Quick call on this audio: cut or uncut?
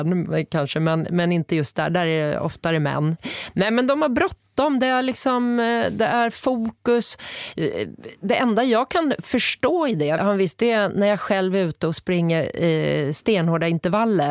cut